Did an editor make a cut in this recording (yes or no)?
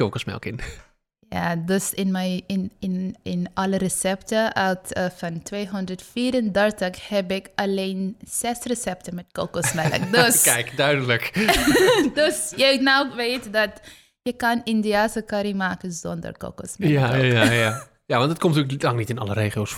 no